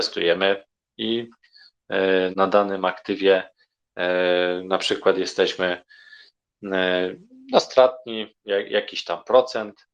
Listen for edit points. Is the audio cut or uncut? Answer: cut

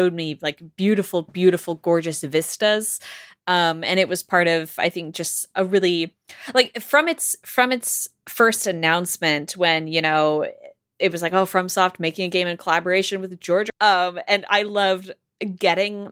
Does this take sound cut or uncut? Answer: cut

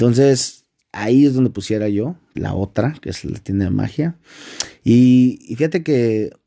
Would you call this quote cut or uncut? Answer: cut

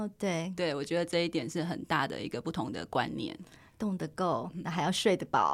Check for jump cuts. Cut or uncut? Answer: uncut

